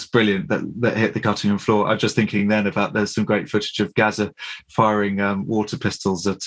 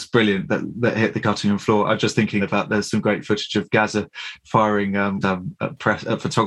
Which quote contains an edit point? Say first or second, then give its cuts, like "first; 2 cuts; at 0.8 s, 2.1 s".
second; 2 cuts; at 2.4 s, 5.2 s